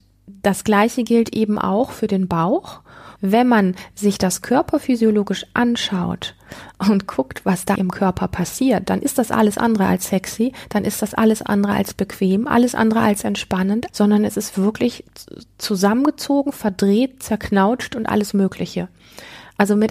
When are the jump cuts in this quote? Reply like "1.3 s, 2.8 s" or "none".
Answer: 3.2 s, 7.8 s, 13.9 s